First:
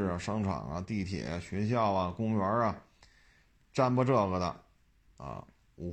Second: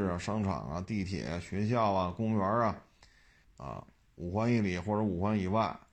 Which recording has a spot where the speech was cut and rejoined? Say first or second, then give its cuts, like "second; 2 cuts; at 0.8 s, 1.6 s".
second; 1 cut; at 3.4 s